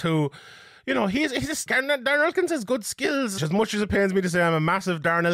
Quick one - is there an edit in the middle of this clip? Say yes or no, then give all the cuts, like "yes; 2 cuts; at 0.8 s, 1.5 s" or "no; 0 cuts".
yes; 2 cuts; at 1.7 s, 3.4 s